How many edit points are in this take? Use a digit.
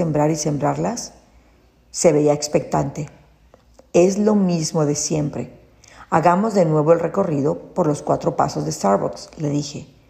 0